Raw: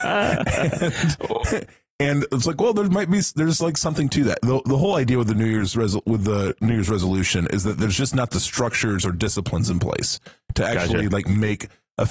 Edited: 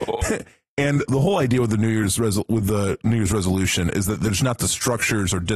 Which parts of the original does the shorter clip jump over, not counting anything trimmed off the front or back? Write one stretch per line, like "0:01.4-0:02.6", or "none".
0:02.3-0:04.6
0:08.0-0:08.1